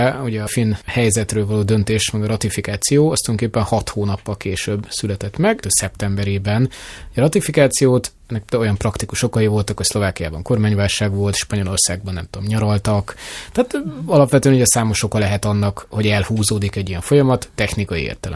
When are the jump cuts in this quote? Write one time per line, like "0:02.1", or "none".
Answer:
0:05.6

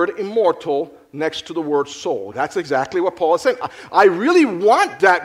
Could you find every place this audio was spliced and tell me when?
0:02.3
0:03.9

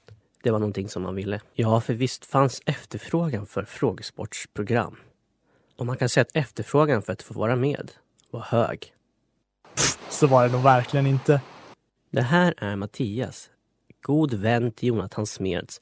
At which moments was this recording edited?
0:10.0

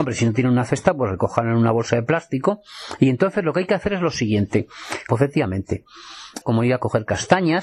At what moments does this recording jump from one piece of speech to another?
0:05.1
0:06.4

